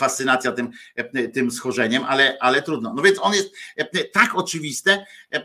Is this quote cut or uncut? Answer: uncut